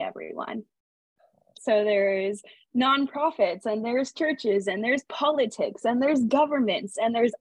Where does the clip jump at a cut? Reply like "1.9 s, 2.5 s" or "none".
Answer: 1.6 s